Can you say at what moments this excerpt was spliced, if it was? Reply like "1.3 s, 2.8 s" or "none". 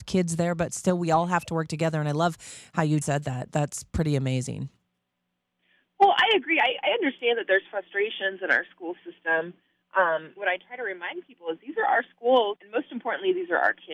3.0 s, 10.4 s, 12.6 s